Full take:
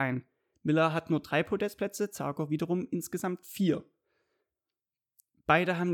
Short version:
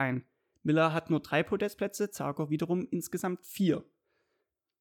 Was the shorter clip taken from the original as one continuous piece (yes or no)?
yes